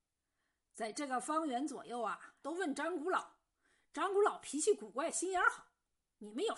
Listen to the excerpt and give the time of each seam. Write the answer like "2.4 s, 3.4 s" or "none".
2.4 s